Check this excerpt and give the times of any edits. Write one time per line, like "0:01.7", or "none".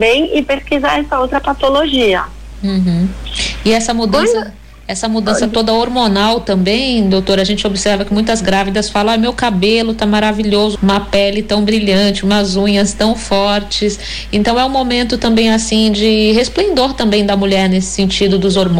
0:10.8